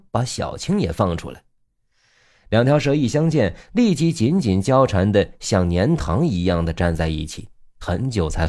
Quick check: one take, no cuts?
yes; 0 cuts

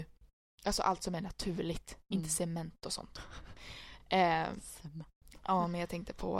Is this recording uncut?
yes; 0 cuts

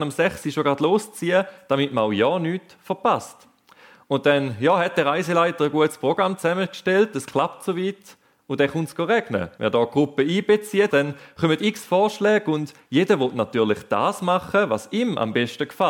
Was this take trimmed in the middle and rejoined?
yes; 2 cuts; at 9.6 s, 10.9 s

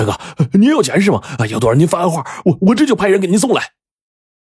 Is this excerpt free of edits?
yes; 0 cuts

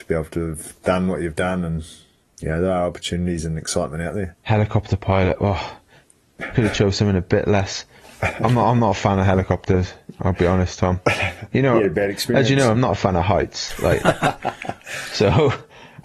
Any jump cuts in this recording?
no; 0 cuts

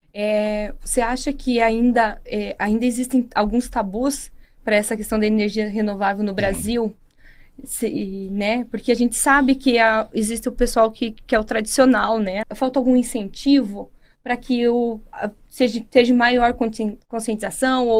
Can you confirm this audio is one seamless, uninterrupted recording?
no; 1 cut; at 12.4 s

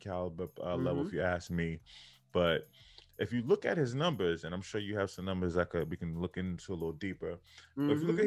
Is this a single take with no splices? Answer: yes; 0 cuts

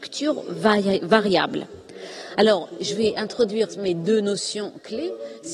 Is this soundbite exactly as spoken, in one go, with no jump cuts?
yes; 0 cuts

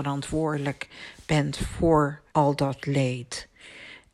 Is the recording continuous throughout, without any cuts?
no; 1 cut; at 2.3 s

